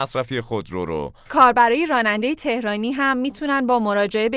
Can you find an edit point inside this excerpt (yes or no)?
yes